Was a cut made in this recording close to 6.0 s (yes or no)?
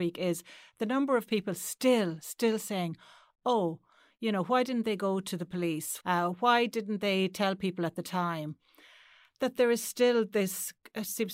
yes